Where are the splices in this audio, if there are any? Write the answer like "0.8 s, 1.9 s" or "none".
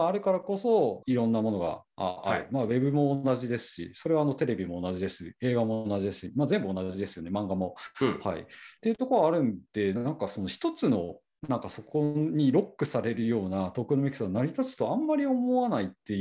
1.0 s